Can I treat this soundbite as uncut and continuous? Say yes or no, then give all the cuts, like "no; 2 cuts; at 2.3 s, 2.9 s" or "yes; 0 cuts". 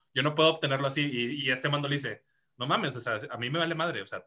no; 1 cut; at 1.4 s